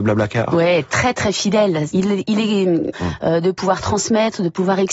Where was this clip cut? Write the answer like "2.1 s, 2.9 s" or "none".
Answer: 1.9 s, 2.9 s